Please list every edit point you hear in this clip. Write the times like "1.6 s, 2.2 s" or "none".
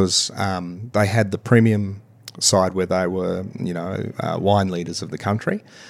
none